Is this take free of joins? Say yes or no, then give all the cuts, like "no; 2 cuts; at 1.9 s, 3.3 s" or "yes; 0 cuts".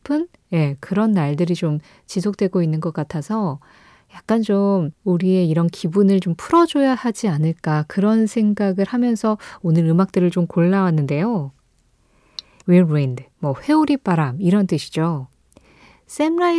no; 1 cut; at 12.6 s